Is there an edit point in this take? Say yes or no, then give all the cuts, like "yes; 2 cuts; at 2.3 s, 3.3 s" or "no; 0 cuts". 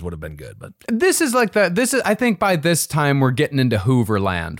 no; 0 cuts